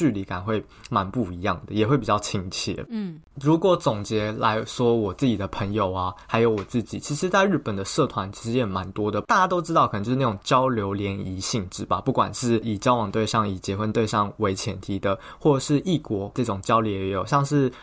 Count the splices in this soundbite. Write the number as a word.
zero